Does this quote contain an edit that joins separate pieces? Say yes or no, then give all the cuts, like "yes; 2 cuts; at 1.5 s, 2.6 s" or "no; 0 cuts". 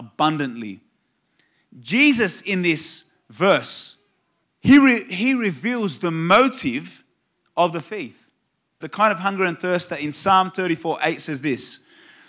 yes; 2 cuts; at 4.4 s, 8.8 s